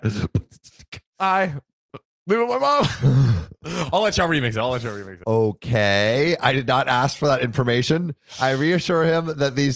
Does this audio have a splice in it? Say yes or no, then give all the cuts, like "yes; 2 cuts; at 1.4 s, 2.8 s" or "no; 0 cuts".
no; 0 cuts